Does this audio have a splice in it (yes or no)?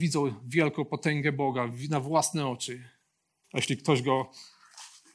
yes